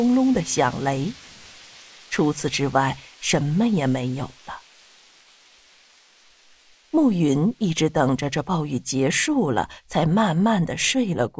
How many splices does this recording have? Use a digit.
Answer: 0